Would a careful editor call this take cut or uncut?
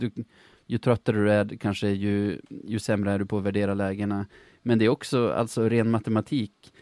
uncut